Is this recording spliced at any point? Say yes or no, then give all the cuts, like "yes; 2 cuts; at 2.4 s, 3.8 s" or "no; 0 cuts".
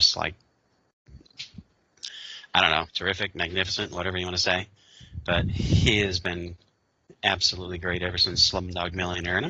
yes; 1 cut; at 2.9 s